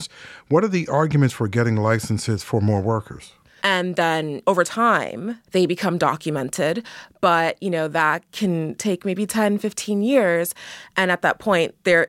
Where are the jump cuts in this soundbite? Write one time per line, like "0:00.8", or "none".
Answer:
0:03.6
0:05.5